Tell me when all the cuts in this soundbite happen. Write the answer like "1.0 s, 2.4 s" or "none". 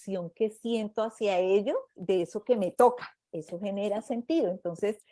1.9 s, 3.3 s